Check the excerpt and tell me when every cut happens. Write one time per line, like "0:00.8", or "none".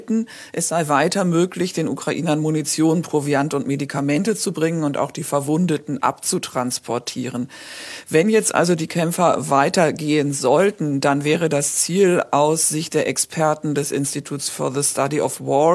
none